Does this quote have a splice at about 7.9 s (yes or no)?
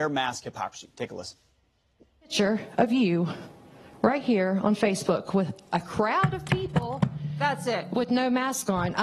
no